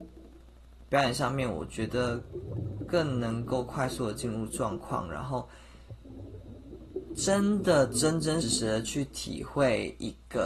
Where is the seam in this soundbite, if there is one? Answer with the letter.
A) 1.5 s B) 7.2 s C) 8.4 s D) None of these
C